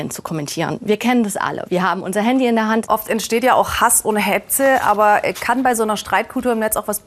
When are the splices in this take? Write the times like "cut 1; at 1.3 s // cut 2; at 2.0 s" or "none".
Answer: cut 1; at 2.8 s

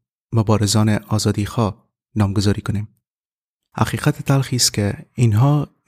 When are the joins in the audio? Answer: cut 1; at 3.7 s

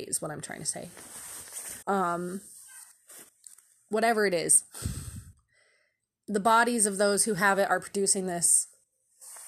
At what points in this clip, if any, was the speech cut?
cut 1; at 1.8 s

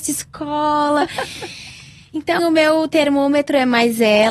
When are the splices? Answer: cut 1; at 2.4 s

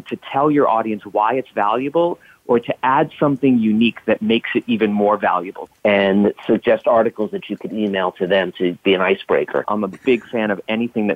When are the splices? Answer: cut 1; at 5.7 s

